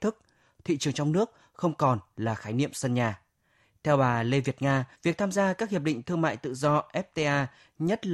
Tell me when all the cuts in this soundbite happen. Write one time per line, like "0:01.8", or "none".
0:04.9